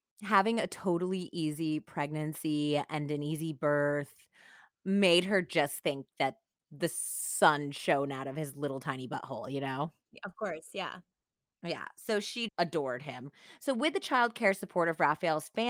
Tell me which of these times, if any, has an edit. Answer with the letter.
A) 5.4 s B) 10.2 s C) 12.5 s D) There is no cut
C